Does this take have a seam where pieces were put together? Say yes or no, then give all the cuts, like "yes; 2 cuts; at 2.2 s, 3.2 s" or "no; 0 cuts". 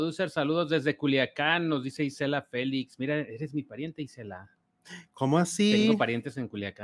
no; 0 cuts